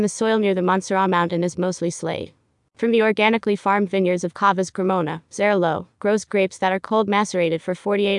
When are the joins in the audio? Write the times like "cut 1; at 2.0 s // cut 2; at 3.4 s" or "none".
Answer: cut 1; at 5.3 s